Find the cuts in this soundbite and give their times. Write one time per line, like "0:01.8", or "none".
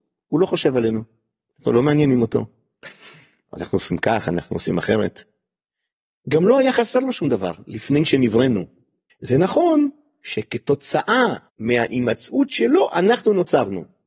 0:09.1
0:11.5